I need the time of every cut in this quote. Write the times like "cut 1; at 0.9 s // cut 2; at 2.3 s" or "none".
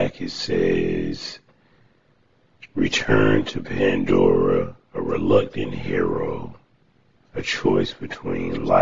cut 1; at 7.2 s